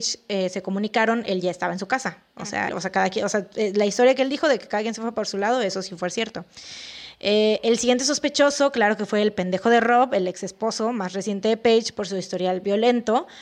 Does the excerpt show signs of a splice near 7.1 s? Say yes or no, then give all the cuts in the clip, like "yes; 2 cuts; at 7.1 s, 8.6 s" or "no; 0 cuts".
no; 1 cut; at 2.7 s